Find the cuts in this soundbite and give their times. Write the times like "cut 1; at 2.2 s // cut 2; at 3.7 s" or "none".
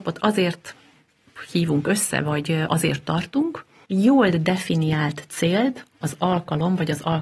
cut 1; at 3.8 s